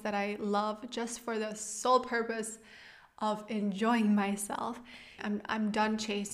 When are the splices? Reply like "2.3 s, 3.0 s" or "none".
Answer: 5.2 s